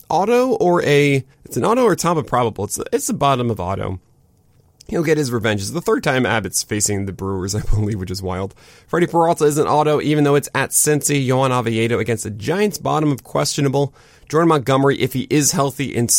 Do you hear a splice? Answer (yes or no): yes